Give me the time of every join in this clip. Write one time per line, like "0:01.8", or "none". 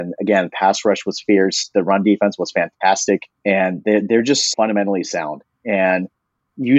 0:03.4
0:04.5